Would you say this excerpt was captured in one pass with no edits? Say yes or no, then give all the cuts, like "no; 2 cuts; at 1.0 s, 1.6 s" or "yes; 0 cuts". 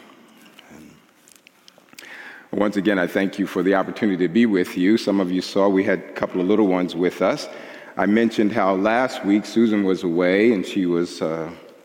yes; 0 cuts